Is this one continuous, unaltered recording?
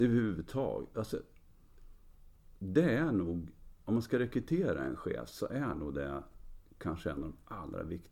yes; 0 cuts

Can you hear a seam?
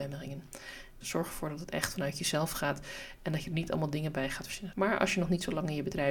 yes; 2 cuts; at 1.0 s, 4.7 s

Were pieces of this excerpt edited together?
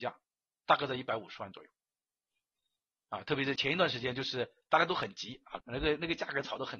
yes; 2 cuts; at 3.6 s, 5.6 s

